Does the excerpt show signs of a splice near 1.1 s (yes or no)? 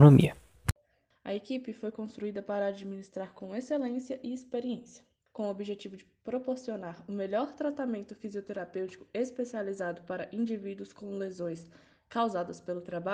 yes